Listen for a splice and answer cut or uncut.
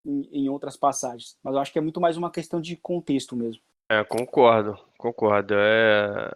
uncut